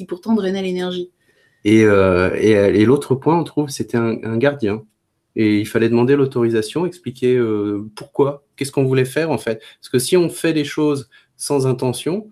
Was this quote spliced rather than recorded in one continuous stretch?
no; 0 cuts

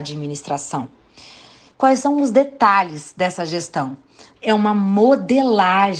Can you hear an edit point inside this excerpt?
yes; 1 cut; at 4.4 s

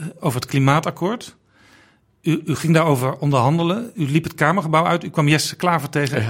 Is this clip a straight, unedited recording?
yes; 0 cuts

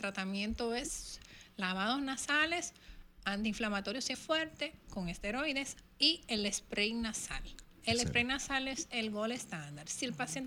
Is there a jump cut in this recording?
yes; 1 cut; at 4.1 s

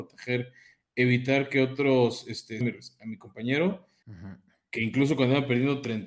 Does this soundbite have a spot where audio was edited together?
yes; 2 cuts; at 2.6 s, 4.0 s

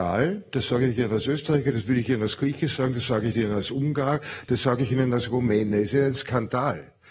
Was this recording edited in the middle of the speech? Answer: no; 0 cuts

